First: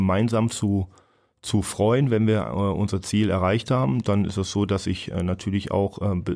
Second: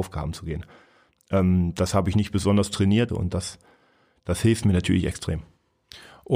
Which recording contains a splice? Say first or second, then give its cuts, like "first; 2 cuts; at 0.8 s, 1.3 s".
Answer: second; 1 cut; at 3.1 s